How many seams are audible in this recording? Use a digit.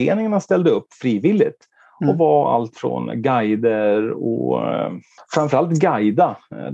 1